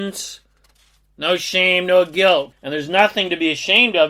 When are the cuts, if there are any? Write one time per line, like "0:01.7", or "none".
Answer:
0:02.5